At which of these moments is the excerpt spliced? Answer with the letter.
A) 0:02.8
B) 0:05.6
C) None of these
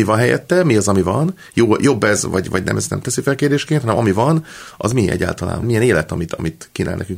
B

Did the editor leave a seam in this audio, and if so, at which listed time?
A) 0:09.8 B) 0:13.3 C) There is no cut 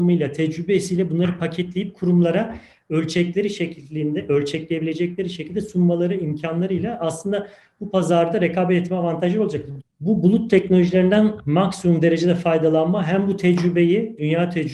A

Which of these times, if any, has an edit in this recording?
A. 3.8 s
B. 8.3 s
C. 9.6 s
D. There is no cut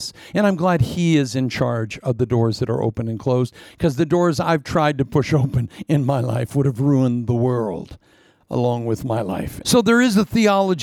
C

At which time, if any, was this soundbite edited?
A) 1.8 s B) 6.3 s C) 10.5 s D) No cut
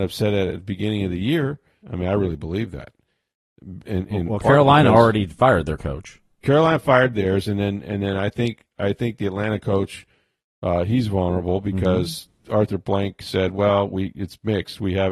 A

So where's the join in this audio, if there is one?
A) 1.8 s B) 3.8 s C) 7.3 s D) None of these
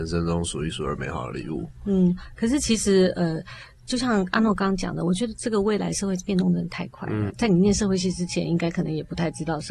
C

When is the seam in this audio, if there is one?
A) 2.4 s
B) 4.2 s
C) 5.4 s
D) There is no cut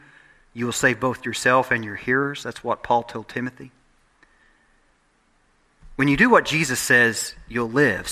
D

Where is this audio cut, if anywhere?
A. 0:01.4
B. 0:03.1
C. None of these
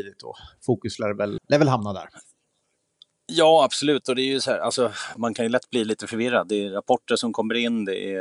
A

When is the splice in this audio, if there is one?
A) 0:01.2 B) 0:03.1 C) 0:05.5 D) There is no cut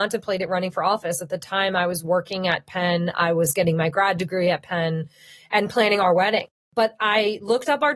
D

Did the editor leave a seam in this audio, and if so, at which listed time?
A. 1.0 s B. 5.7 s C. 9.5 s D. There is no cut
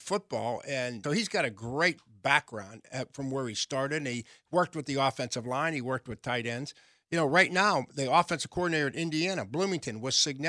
A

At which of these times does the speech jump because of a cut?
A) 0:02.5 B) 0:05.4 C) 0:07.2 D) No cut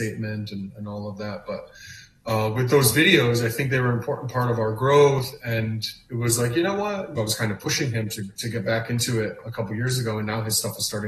C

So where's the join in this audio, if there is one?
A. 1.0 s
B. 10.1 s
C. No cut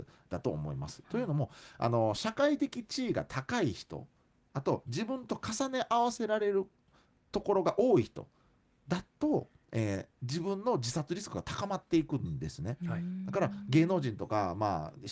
A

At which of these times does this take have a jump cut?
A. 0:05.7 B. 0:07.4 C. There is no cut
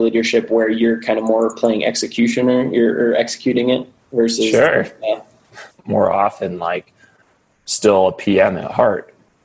A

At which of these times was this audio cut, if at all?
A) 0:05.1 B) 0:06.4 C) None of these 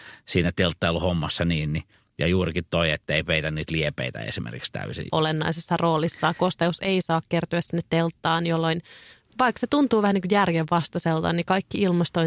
A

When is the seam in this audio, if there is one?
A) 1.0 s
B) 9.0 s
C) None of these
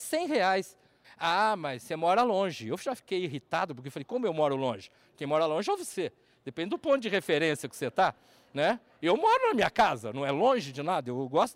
A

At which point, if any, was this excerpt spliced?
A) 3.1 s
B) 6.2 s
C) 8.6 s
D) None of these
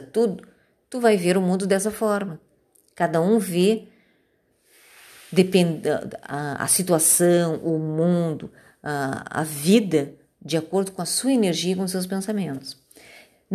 D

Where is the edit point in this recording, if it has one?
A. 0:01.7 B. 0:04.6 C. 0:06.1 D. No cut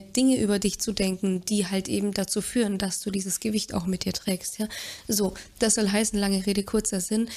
D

